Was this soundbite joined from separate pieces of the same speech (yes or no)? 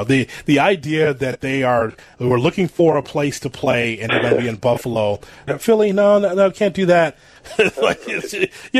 yes